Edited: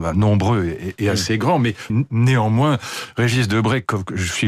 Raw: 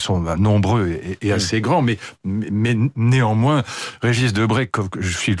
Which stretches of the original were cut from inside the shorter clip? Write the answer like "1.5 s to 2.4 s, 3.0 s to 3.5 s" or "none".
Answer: 2.1 s to 2.7 s

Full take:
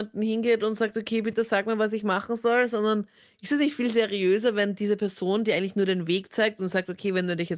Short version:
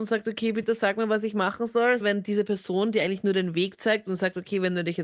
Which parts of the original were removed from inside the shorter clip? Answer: 2.7 s to 4.5 s

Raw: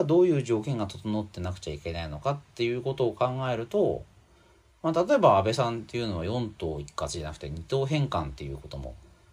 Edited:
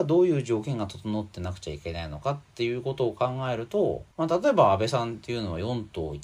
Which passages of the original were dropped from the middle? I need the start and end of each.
4.1 s to 4.8 s

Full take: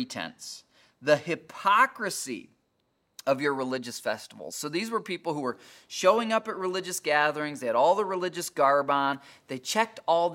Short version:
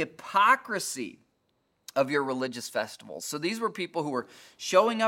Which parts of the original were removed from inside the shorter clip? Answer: none

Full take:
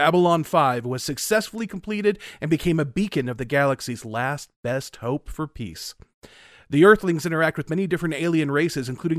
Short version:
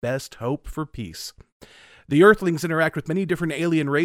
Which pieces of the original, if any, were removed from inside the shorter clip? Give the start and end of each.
none

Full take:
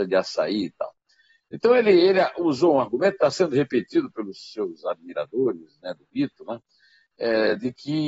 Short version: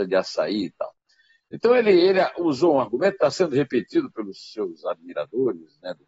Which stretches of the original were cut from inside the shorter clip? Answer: none

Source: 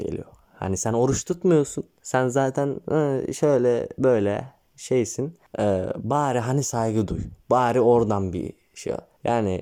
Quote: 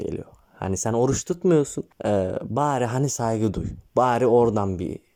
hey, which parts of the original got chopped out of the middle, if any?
1.9 s to 5.4 s

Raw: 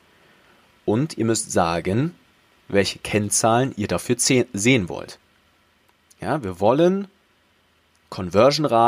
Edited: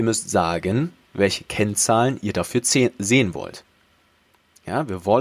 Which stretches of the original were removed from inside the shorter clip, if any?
2.2 s to 2.6 s

